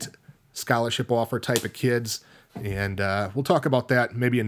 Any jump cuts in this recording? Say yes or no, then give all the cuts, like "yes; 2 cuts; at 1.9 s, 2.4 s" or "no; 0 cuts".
no; 0 cuts